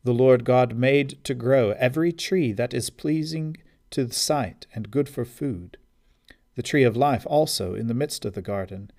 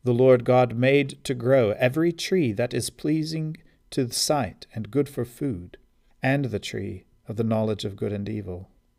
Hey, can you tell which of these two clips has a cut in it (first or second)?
second